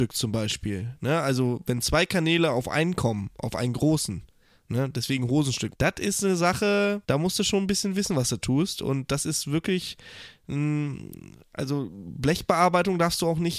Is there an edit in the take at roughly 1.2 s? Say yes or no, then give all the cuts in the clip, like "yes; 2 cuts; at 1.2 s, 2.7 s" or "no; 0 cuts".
no; 2 cuts; at 5.7 s, 7.0 s